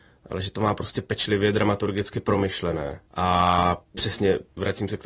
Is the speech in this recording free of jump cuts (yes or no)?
yes